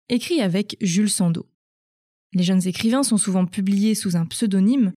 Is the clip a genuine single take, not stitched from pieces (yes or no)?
yes